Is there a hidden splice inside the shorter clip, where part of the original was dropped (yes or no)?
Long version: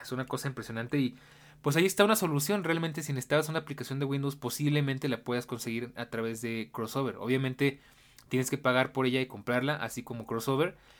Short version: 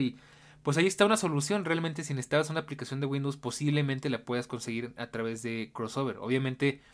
no